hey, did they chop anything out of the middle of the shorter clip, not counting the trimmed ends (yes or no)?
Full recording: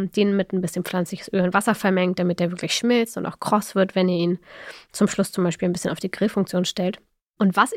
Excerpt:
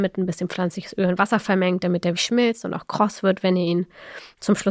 yes